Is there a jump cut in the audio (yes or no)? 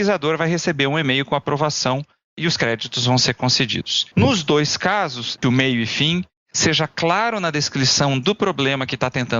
yes